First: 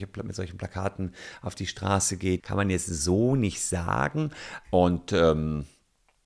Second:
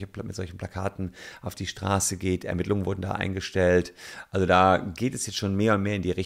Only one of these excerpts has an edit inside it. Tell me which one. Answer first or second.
first